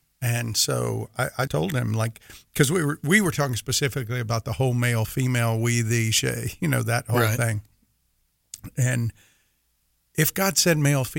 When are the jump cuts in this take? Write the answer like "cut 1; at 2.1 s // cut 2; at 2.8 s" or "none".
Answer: cut 1; at 1.5 s